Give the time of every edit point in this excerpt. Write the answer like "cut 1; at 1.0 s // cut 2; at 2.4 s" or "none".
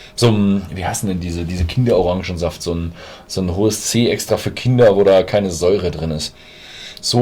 none